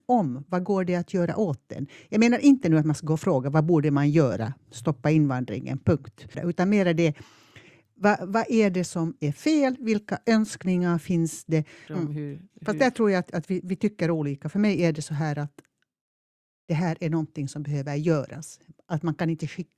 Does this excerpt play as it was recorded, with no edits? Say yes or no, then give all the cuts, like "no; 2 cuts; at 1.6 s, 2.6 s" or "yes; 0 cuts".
no; 2 cuts; at 6.3 s, 11.9 s